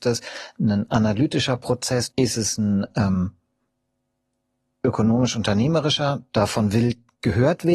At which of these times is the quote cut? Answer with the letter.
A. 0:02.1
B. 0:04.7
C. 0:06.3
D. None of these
A